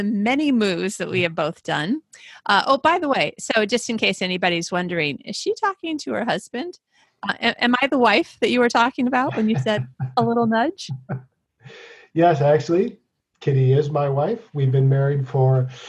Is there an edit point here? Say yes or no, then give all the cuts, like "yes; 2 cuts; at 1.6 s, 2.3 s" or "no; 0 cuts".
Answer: no; 0 cuts